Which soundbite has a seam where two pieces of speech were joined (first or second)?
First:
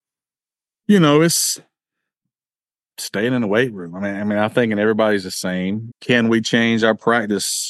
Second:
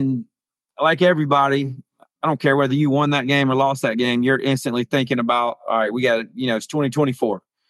first